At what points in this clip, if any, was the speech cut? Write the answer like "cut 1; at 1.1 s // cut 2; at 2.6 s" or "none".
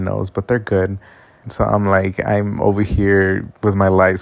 cut 1; at 1.4 s